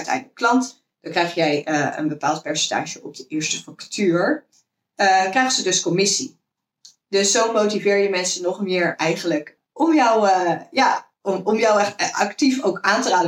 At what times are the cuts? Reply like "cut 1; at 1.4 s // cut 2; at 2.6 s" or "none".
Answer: none